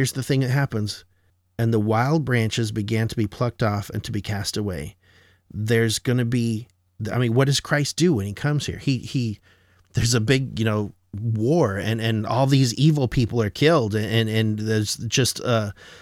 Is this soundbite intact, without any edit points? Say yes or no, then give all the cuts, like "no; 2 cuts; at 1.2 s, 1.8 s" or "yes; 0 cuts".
yes; 0 cuts